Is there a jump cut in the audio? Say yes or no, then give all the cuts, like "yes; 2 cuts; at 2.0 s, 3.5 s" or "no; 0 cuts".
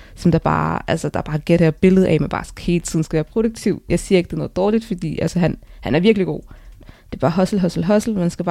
yes; 1 cut; at 6.8 s